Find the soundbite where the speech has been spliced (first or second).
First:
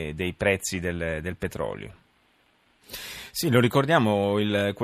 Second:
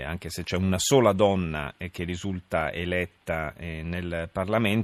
first